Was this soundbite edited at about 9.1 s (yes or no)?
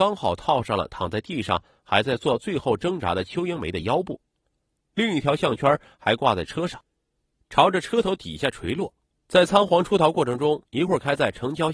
yes